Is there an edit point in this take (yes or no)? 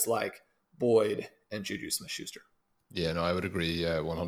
no